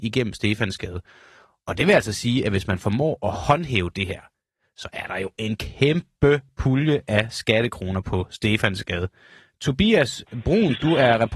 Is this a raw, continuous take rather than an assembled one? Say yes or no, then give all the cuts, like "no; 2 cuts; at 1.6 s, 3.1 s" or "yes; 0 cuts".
yes; 0 cuts